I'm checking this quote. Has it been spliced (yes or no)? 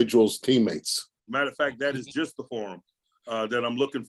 yes